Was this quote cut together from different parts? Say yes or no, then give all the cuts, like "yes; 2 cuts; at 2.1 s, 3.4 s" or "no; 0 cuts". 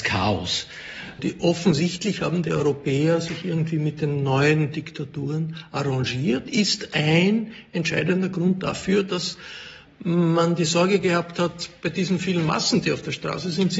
yes; 1 cut; at 1.2 s